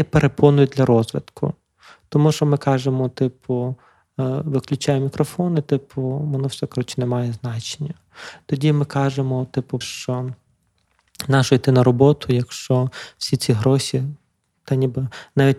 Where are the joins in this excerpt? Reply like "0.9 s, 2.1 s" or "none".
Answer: 9.8 s